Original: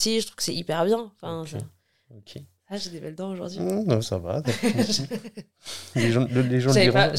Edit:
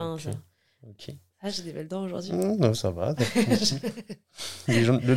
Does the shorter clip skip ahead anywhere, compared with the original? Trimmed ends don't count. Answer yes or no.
no